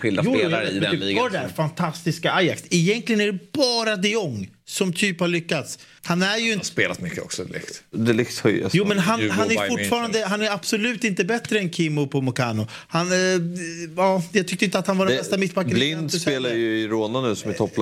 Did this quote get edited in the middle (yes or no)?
yes